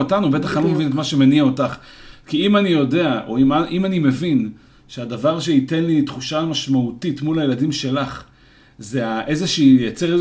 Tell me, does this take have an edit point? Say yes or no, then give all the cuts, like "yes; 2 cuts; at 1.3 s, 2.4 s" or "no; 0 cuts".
no; 0 cuts